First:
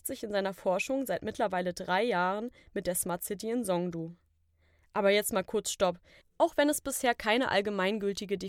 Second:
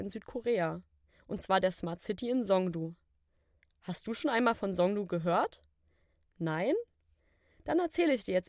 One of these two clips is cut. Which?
first; 1 cut; at 6.2 s

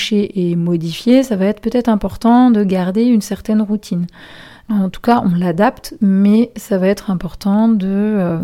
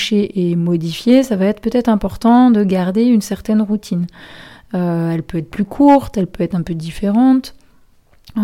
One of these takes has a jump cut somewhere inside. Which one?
first; 1 cut; at 4.6 s

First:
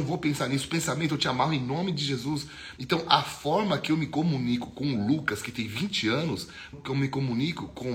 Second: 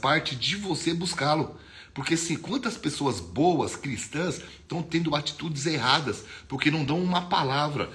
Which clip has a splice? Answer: first; 2 cuts; at 2.8 s, 6.7 s

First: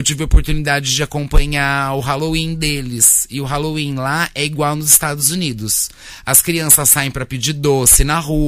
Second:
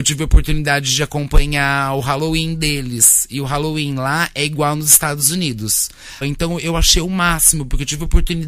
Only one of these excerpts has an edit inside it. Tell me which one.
second; 1 cut; at 6.2 s

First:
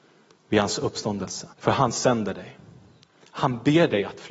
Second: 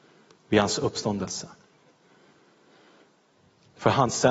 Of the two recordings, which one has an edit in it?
first; 1 cut; at 1.5 s

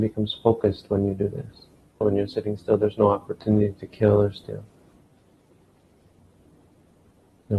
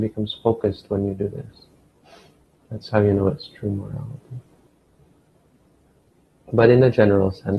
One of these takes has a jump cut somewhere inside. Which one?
first; 1 cut; at 2.0 s

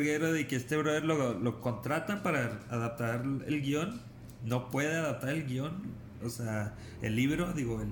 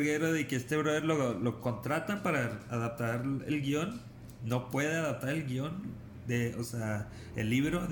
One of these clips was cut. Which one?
first; 1 cut; at 6.2 s

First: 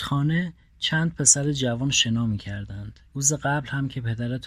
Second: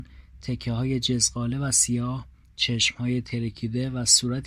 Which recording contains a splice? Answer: first; 1 cut; at 3.1 s

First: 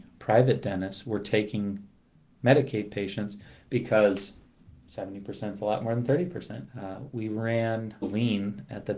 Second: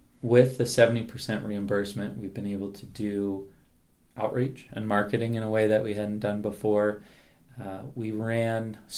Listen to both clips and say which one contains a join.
first; 2 cuts; at 6.7 s, 8.0 s

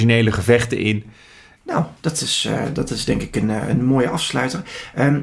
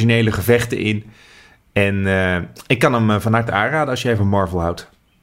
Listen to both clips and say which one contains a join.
first; 1 cut; at 1.6 s

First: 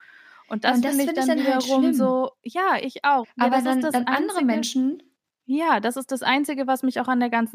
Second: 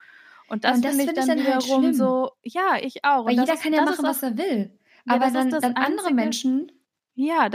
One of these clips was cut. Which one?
first; 1 cut; at 3.2 s

